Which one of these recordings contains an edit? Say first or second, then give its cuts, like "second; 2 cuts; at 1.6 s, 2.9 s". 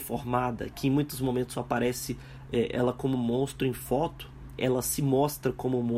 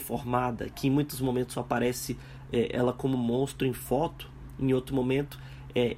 first; 1 cut; at 4.6 s